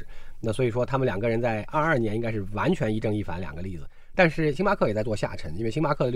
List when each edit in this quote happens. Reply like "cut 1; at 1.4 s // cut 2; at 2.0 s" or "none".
none